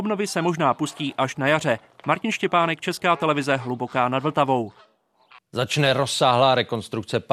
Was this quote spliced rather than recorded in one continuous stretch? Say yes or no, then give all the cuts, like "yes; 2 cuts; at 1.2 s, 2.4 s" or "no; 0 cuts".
no; 0 cuts